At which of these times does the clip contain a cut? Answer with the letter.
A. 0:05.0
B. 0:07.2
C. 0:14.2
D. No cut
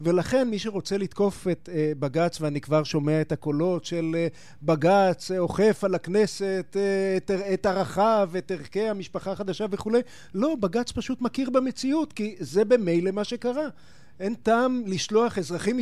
D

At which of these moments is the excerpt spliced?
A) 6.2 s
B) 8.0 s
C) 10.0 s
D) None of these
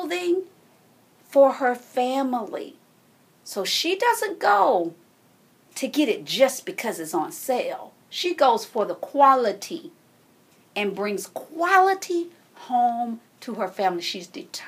D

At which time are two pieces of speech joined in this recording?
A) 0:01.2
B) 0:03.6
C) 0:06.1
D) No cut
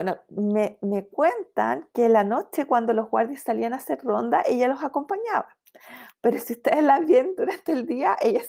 D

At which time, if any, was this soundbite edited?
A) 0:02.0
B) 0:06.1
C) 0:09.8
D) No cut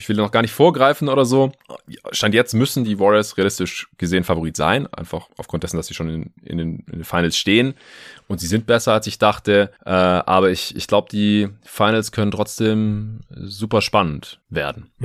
D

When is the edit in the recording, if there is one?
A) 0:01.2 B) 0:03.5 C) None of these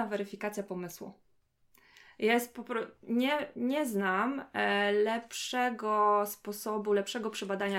C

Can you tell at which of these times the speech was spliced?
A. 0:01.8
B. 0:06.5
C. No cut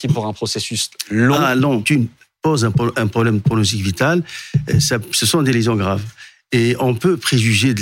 A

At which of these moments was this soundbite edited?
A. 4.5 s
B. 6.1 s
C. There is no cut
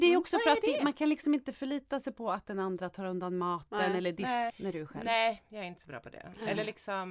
A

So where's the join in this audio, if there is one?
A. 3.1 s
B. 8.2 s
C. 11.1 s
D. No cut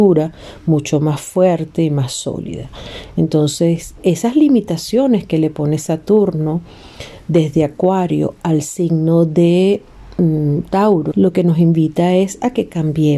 C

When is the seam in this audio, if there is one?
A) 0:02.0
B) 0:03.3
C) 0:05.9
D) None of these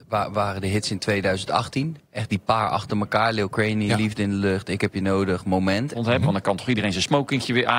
C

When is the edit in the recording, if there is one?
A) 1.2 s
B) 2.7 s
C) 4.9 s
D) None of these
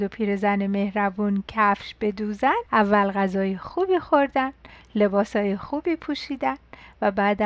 B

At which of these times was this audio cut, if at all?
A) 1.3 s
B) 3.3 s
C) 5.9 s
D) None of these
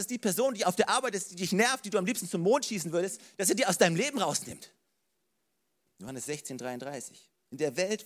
C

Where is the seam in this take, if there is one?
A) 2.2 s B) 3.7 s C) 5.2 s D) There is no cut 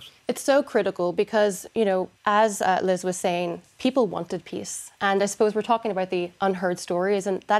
A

